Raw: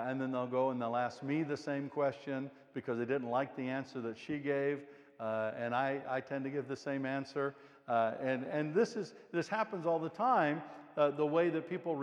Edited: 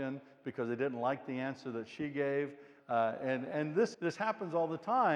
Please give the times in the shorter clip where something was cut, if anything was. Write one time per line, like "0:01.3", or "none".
0:02.8
0:03.9